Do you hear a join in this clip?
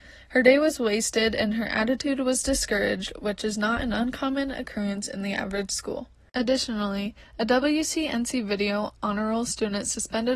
no; 0 cuts

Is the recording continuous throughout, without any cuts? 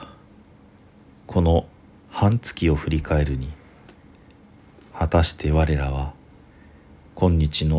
yes; 0 cuts

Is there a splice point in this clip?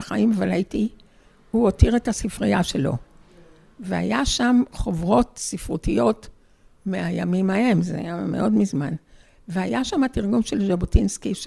no; 0 cuts

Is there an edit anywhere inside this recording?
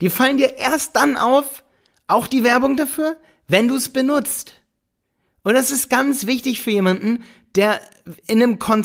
no; 0 cuts

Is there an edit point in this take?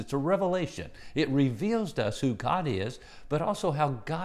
no; 0 cuts

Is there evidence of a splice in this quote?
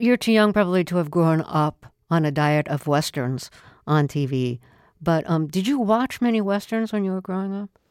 no; 0 cuts

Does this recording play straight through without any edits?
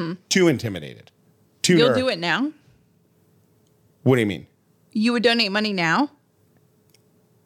yes; 0 cuts

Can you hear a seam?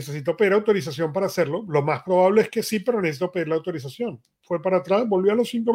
no; 0 cuts

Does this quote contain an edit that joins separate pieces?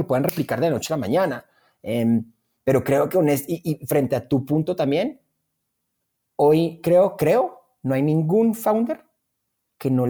no; 0 cuts

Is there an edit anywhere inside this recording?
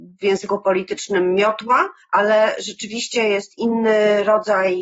yes; 1 cut; at 2.0 s

